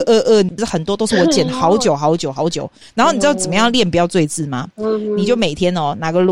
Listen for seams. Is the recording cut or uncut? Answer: uncut